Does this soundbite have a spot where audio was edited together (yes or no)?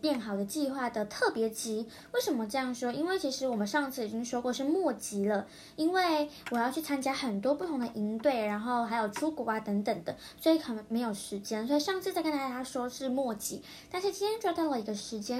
no